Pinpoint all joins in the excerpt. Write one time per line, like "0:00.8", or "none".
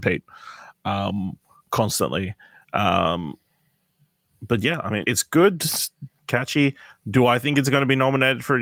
0:05.0
0:06.2